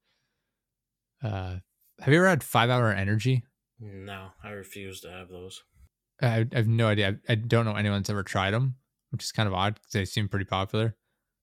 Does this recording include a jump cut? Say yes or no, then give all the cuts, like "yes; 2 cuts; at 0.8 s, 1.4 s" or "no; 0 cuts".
no; 0 cuts